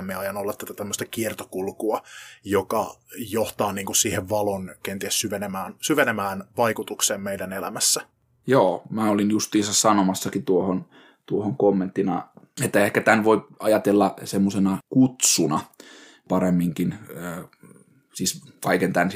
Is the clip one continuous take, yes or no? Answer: yes